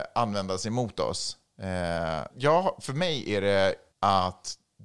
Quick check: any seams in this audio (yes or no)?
yes